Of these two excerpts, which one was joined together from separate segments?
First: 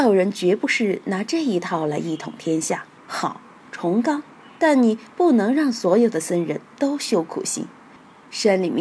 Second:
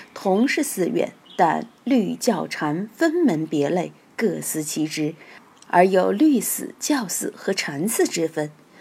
first; 1 cut; at 3.0 s

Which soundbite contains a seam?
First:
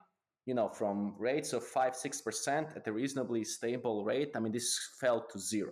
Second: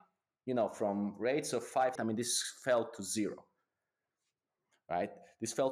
second; 1 cut; at 2.0 s

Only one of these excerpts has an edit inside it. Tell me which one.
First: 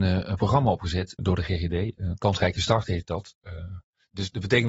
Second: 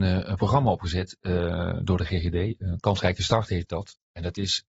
first; 2 cuts; at 1.2 s, 3.4 s

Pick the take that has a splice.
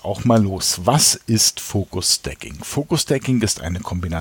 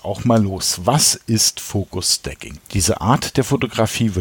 second; 1 cut; at 2.6 s

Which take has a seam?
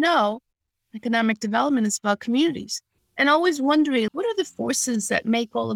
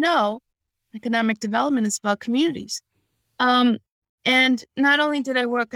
first; 2 cuts; at 3.0 s, 4.1 s

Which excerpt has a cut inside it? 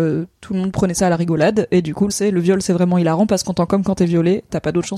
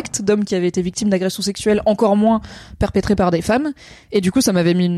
first; 1 cut; at 2.1 s

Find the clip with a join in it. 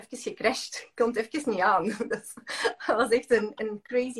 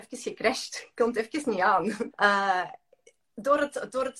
second; 1 cut; at 2.1 s

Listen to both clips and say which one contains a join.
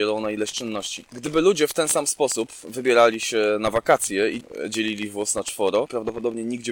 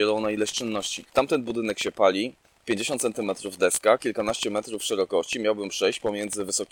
second; 1 cut; at 1.1 s

